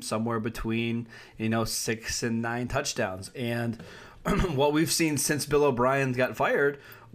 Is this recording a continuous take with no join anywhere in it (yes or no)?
yes